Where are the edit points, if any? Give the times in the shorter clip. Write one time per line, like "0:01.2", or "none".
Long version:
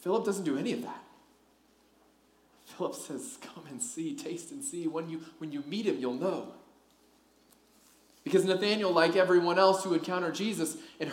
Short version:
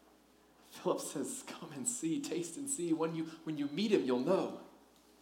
none